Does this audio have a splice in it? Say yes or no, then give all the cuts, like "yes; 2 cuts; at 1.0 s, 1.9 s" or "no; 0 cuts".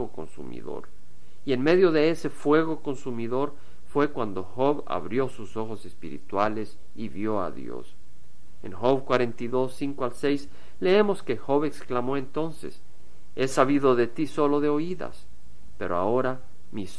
no; 0 cuts